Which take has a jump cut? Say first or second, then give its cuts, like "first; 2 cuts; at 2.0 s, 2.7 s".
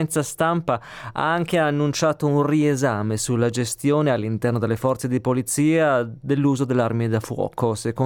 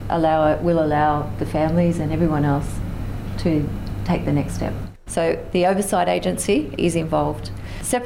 second; 2 cuts; at 5.1 s, 6.8 s